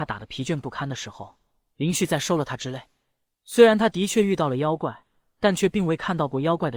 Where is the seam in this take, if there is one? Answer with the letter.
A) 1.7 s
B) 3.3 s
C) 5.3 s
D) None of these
B